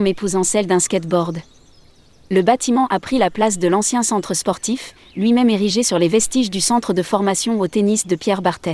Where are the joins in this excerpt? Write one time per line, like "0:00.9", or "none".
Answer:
none